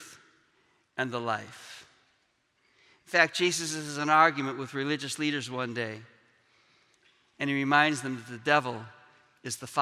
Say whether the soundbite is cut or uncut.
uncut